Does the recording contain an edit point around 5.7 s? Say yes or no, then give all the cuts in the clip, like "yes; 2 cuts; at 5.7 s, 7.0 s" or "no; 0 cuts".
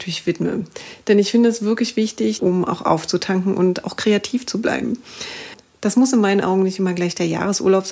no; 1 cut; at 2.4 s